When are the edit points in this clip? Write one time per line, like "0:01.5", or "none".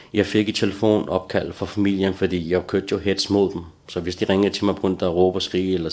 none